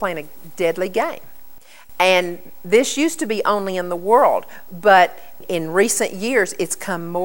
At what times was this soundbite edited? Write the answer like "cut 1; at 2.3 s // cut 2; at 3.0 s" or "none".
none